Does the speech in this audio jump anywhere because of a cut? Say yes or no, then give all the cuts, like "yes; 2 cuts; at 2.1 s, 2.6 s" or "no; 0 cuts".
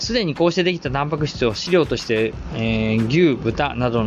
no; 0 cuts